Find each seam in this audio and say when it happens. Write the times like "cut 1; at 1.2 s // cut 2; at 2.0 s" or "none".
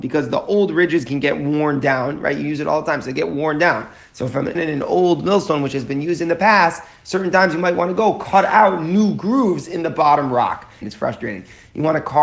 cut 1; at 4.6 s // cut 2; at 10.8 s